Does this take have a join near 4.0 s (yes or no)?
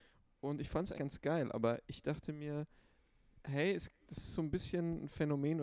no